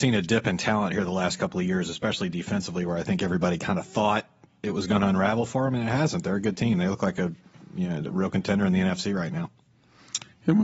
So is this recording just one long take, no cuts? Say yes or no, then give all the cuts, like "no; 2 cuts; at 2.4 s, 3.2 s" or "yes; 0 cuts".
yes; 0 cuts